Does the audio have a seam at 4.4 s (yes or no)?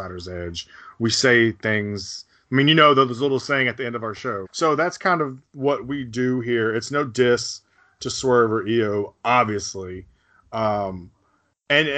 yes